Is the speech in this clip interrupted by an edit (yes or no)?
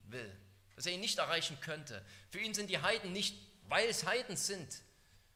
no